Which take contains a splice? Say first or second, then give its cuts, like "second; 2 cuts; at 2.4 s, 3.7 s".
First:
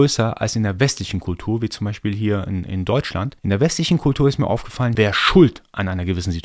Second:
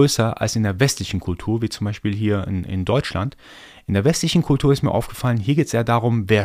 first; 2 cuts; at 3.4 s, 5.0 s